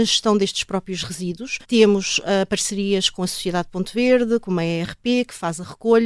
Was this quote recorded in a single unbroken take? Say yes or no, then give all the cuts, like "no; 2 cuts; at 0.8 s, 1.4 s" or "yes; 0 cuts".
no; 1 cut; at 1.6 s